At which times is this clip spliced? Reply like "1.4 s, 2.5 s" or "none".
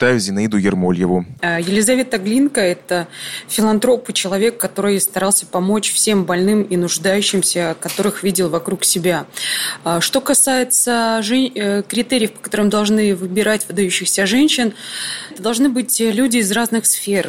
1.4 s, 15.3 s